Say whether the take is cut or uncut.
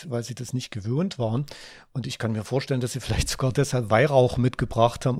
uncut